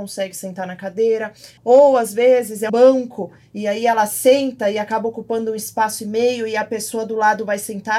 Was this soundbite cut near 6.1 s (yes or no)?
no